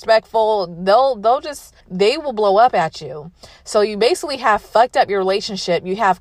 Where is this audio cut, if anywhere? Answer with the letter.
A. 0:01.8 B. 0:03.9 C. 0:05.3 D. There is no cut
A